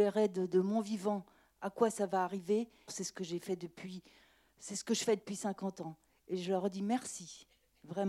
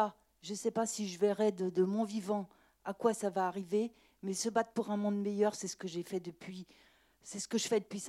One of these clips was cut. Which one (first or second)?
first